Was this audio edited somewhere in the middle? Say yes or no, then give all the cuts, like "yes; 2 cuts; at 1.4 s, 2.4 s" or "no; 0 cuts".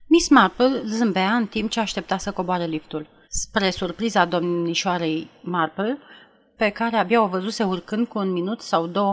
yes; 2 cuts; at 3.2 s, 6.6 s